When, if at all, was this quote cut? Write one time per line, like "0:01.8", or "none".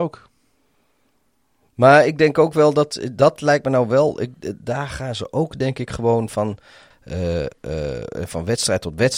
0:06.9